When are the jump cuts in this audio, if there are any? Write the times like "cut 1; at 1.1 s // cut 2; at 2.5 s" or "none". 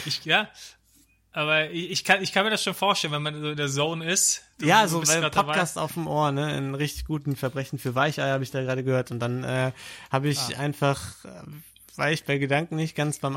none